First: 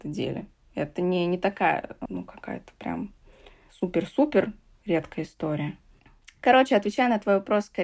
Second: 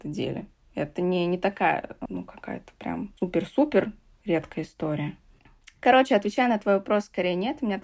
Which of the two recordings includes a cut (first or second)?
second